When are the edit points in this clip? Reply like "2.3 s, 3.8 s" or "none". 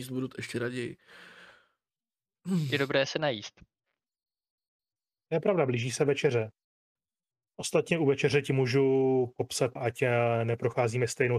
7.0 s, 9.8 s